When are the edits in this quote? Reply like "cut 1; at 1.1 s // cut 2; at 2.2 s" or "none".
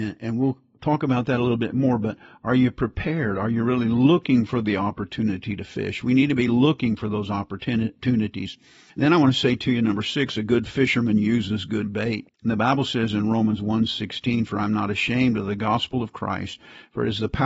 cut 1; at 12.3 s